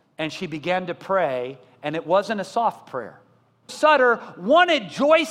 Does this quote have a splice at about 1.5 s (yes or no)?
no